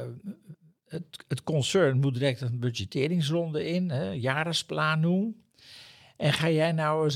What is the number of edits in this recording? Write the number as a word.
zero